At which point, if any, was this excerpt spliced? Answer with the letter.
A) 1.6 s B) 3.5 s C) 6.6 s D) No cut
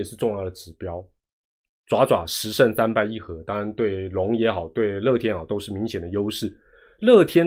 D